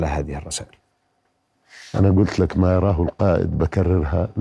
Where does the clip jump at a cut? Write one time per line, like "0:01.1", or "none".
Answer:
none